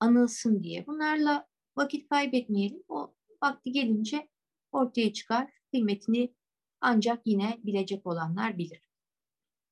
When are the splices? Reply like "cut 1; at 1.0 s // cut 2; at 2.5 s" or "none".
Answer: none